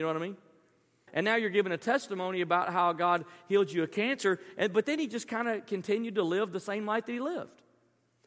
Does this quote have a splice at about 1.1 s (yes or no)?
yes